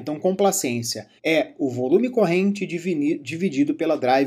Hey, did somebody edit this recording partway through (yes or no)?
yes